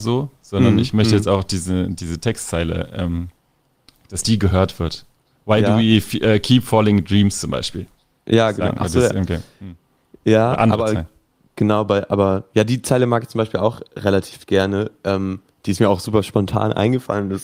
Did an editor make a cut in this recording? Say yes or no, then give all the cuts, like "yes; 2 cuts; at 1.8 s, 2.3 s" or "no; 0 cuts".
no; 0 cuts